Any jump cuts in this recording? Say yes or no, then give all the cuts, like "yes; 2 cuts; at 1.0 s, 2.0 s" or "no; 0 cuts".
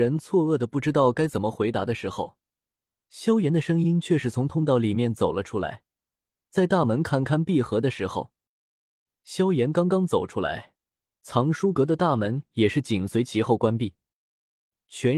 no; 0 cuts